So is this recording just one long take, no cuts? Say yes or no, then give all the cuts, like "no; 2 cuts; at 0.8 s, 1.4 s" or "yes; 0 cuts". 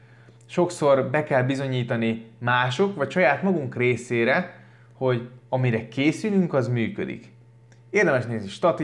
yes; 0 cuts